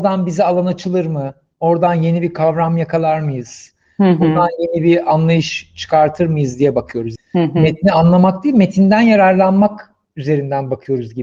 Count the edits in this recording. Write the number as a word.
one